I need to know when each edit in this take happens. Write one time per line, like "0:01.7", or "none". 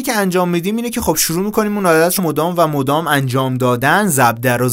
0:02.2